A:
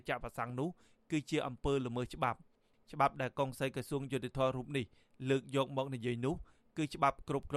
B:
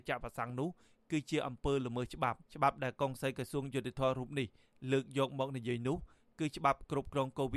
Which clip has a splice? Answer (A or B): B